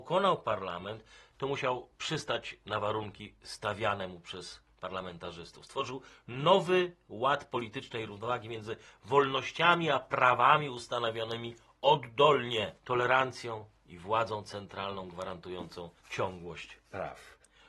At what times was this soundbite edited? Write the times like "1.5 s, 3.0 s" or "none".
8.1 s, 12.8 s, 16.0 s